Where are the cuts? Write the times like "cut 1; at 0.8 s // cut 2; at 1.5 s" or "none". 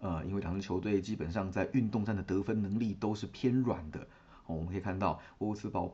none